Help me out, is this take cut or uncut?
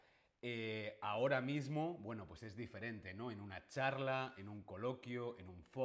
uncut